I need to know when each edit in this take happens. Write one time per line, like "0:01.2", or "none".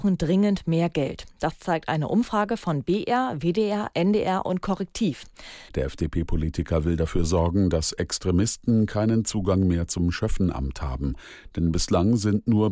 0:05.7